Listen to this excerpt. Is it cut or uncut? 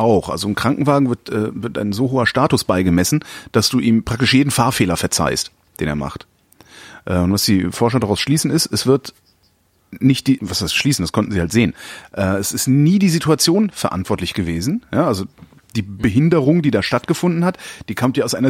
cut